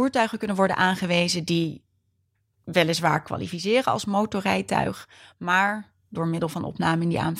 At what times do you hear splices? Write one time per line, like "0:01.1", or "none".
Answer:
none